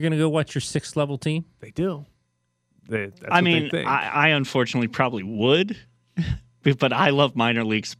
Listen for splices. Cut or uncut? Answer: uncut